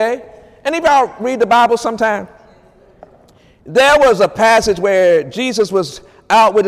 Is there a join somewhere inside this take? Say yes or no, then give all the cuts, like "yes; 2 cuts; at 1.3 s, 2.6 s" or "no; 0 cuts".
no; 0 cuts